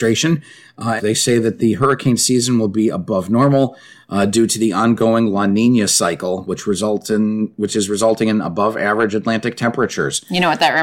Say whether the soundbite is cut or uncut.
cut